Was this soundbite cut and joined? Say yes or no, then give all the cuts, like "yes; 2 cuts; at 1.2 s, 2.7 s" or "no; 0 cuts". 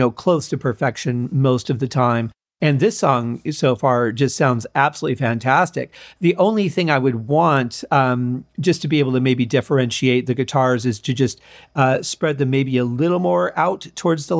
no; 0 cuts